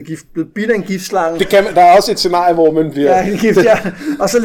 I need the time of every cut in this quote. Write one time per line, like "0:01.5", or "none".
none